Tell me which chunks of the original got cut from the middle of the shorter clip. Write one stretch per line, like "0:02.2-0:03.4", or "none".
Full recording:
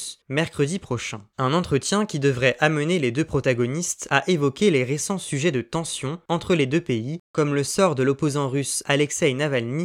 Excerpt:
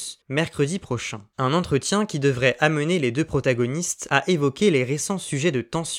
none